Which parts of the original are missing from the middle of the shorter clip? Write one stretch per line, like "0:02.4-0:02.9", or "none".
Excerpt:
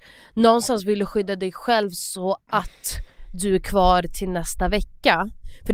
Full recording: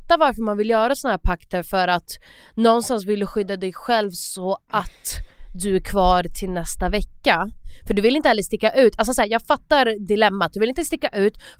none